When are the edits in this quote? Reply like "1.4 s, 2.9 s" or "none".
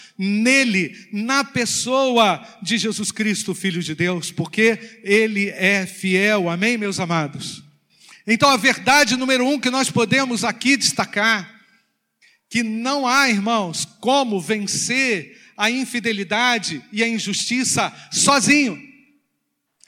none